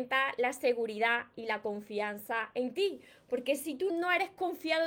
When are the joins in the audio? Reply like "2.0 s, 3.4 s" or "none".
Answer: 3.9 s